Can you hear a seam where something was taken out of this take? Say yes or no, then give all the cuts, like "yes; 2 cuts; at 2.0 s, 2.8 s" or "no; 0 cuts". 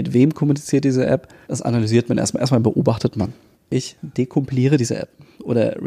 yes; 2 cuts; at 1.4 s, 3.5 s